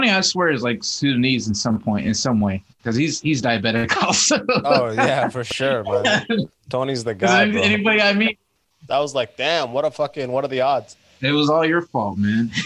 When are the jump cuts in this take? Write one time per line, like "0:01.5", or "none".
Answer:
0:08.9